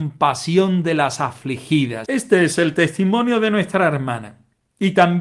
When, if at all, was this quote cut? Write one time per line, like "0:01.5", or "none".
0:02.0